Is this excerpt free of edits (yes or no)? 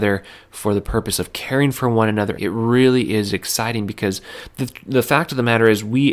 no